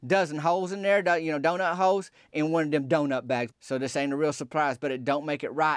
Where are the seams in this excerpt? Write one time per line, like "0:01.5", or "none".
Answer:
0:03.5